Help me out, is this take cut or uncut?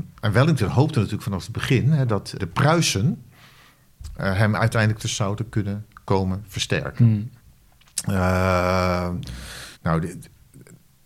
cut